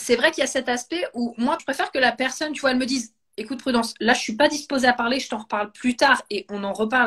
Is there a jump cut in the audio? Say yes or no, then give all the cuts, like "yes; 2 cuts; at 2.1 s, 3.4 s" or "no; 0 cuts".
yes; 1 cut; at 1.6 s